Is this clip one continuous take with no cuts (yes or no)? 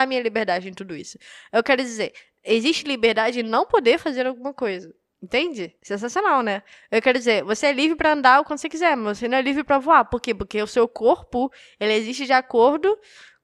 yes